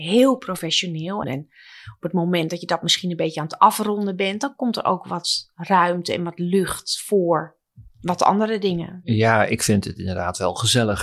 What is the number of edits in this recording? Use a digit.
1